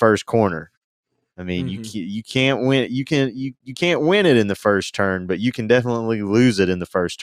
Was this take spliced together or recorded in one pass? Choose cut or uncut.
uncut